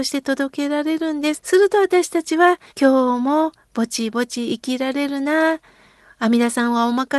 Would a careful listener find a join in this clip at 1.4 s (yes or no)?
yes